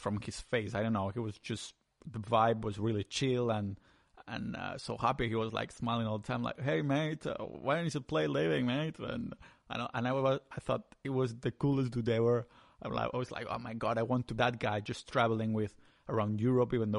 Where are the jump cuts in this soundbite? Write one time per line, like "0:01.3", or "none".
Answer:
0:14.4